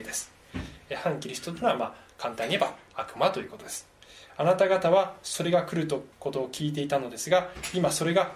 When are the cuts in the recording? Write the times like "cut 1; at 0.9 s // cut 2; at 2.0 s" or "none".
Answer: cut 1; at 6.1 s